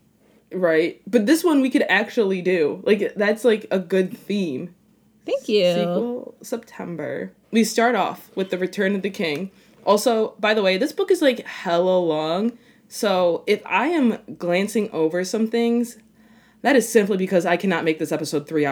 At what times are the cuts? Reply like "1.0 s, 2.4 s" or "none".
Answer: 7.4 s